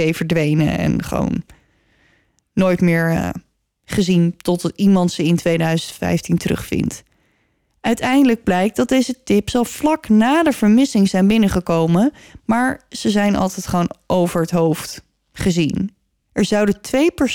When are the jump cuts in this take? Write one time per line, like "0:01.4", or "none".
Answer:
0:07.7
0:16.3